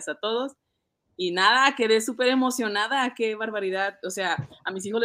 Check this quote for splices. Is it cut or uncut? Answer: uncut